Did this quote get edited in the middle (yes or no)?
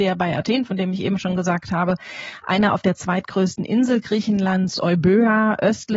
no